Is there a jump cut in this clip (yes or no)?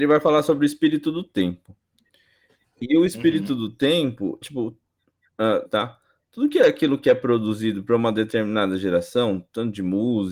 yes